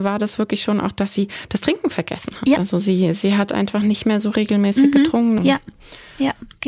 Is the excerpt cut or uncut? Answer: cut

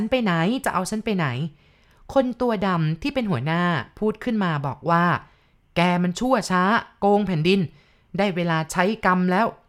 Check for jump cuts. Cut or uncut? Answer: uncut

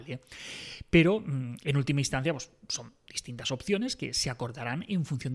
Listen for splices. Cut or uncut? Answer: uncut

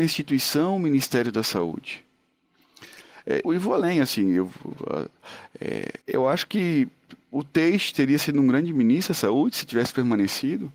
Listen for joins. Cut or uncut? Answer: cut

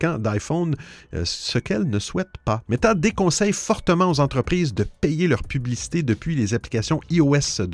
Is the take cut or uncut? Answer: cut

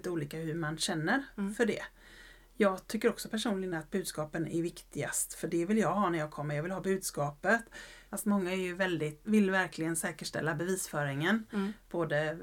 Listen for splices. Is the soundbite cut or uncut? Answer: cut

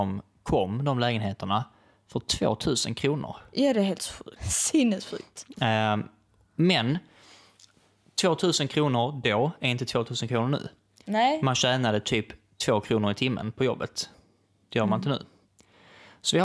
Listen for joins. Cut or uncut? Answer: cut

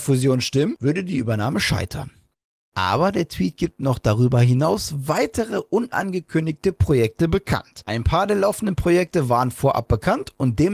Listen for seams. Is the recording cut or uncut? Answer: cut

